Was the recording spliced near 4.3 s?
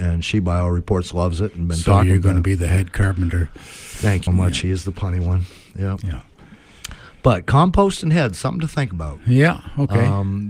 yes; 1 cut; at 4.3 s

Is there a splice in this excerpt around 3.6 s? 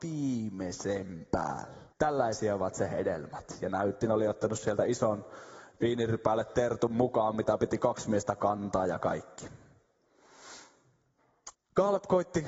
no; 2 cuts; at 1.9 s, 11.5 s

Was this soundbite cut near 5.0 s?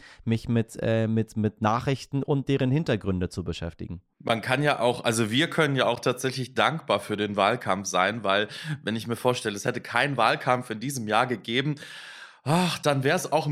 no; 0 cuts

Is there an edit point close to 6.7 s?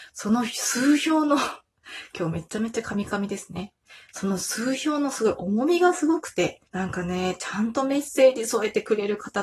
yes; 1 cut; at 6.7 s

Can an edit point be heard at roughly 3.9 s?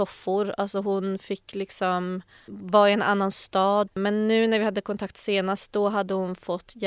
yes; 1 cut; at 3.9 s

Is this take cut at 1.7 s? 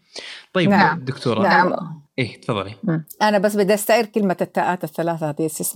no; 0 cuts

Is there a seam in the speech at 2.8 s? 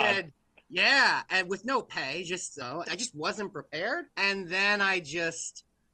yes; 2 cuts; at 2.8 s, 4.1 s

